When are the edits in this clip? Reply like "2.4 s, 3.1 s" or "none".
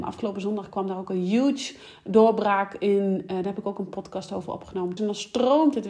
5.0 s